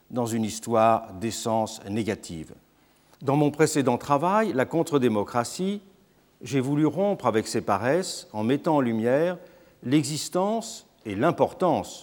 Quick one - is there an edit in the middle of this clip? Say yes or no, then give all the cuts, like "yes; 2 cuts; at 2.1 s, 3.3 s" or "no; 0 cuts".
yes; 1 cut; at 3.1 s